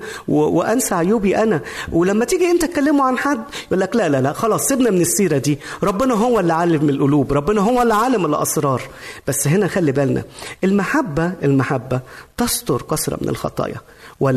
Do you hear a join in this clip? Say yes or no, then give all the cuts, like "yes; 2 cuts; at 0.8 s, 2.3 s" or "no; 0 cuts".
no; 0 cuts